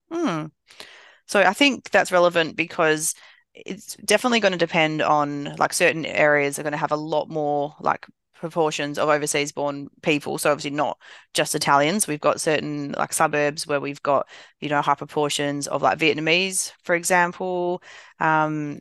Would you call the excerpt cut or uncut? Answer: uncut